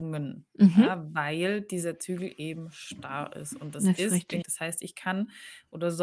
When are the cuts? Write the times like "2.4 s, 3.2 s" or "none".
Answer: 4.4 s